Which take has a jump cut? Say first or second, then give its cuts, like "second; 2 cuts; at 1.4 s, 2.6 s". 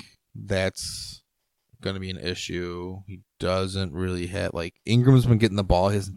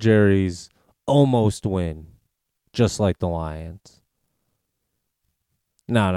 second; 1 cut; at 2.7 s